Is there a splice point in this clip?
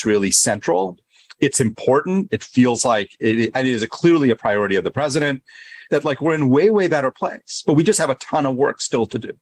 yes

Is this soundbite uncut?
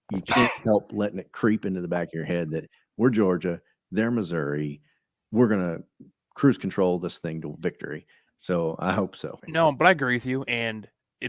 no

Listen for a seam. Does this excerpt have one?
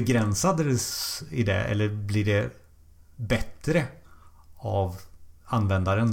no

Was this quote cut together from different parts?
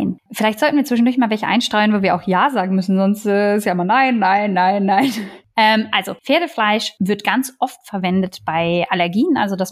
no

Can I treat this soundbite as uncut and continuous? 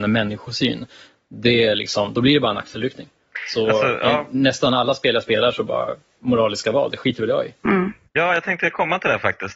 yes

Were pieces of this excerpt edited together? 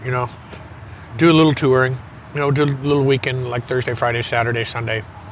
no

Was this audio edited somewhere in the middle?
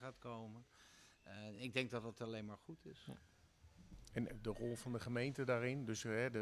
no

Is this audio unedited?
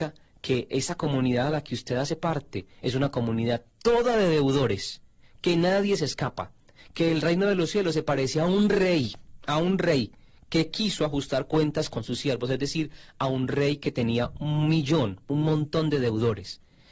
yes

